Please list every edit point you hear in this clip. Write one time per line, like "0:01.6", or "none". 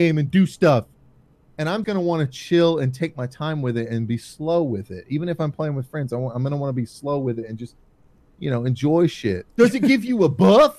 0:01.8
0:09.5

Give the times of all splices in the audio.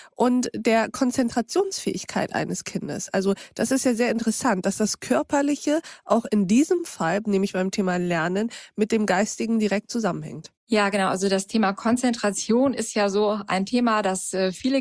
0:10.6

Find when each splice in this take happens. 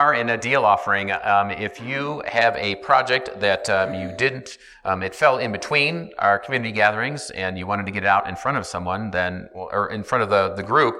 none

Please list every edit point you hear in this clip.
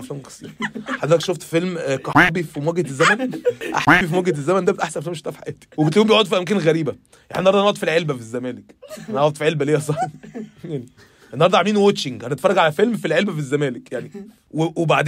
none

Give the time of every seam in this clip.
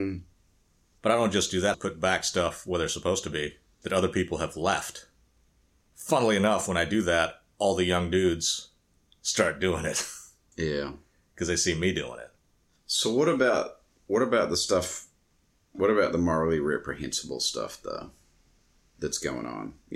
0:01.7

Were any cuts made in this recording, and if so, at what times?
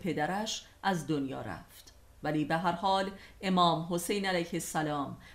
none

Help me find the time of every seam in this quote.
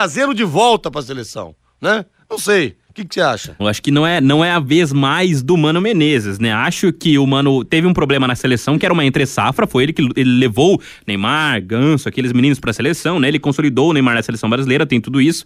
0:03.6

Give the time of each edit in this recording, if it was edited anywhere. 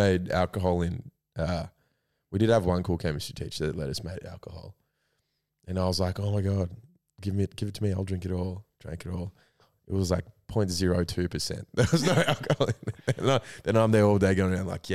none

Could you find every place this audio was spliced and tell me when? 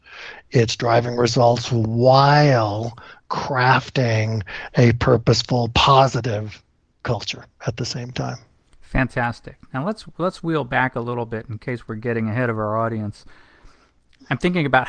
none

